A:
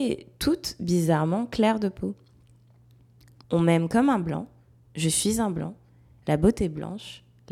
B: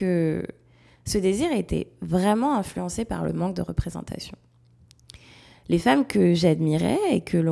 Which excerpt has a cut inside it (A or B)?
A